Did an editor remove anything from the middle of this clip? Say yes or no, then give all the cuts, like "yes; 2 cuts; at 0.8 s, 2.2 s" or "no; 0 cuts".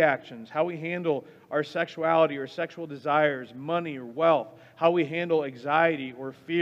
no; 0 cuts